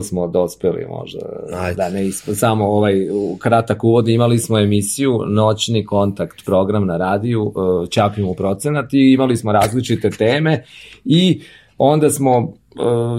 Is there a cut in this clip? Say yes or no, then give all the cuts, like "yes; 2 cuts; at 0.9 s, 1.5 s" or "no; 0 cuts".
no; 0 cuts